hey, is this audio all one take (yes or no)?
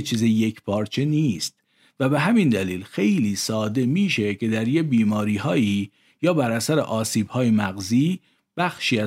yes